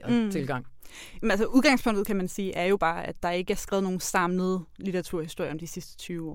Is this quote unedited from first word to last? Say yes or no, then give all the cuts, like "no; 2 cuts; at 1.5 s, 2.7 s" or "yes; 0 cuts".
yes; 0 cuts